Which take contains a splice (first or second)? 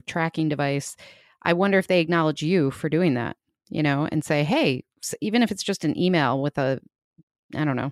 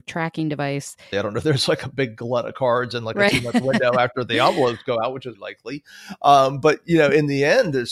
second